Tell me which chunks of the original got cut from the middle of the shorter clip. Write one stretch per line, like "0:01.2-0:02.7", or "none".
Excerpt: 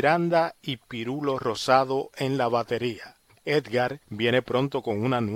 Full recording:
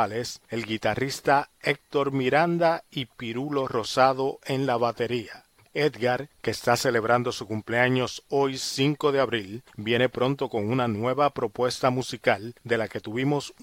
0:06.4-0:09.7